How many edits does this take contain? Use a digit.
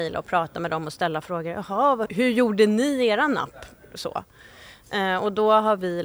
1